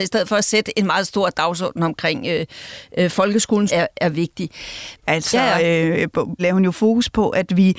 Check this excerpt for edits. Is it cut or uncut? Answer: cut